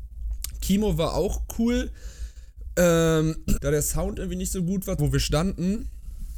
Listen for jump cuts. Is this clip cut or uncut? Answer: cut